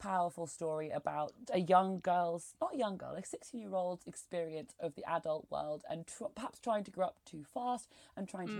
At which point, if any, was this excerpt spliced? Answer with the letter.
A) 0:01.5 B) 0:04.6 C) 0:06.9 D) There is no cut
A